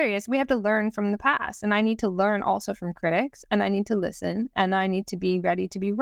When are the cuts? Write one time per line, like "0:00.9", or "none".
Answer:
none